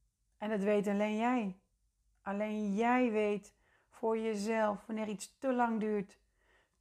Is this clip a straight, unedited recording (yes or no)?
yes